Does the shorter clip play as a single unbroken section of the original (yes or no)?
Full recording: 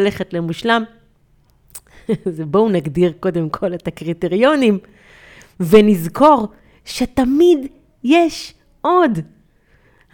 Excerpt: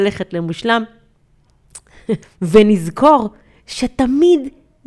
no